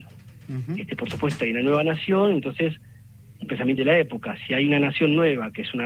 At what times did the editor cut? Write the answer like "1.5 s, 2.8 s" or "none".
3.8 s